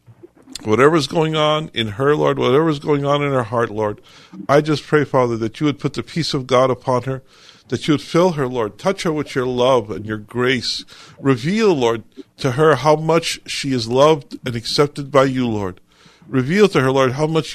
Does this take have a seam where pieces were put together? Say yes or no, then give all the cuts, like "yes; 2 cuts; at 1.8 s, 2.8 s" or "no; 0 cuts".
no; 0 cuts